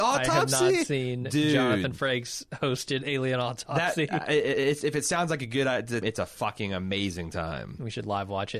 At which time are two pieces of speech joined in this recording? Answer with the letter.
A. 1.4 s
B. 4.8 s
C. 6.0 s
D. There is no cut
C